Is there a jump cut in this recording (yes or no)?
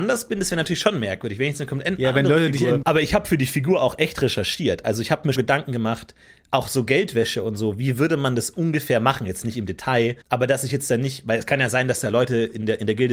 yes